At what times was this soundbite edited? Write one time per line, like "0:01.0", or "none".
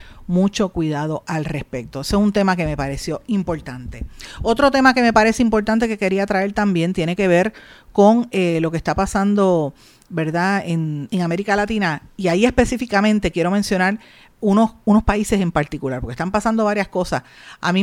0:11.1